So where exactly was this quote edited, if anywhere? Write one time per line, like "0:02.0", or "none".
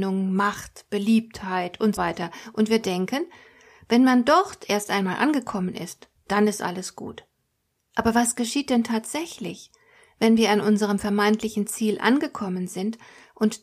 0:02.0